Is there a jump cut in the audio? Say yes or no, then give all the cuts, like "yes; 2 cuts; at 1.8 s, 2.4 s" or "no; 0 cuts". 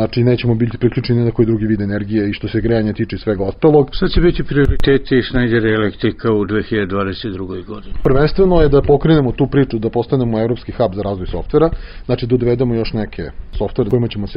yes; 1 cut; at 3.9 s